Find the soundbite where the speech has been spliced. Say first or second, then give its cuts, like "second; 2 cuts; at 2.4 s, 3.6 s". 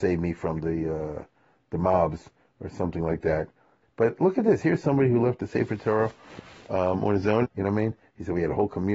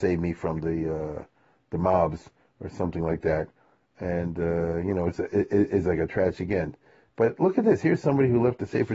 first; 2 cuts; at 3.8 s, 7.4 s